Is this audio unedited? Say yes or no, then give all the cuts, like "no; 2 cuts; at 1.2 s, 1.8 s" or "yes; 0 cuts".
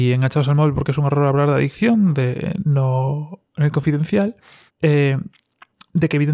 no; 1 cut; at 4.7 s